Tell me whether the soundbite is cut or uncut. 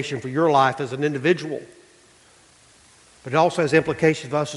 uncut